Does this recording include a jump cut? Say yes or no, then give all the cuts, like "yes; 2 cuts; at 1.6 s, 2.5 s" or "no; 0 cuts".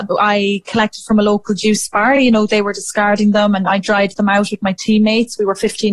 no; 0 cuts